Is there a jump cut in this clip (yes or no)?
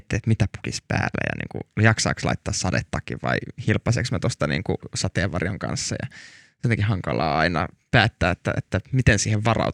no